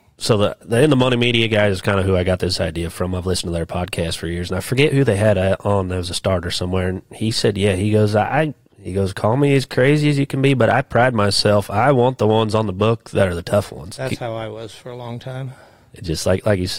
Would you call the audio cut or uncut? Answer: uncut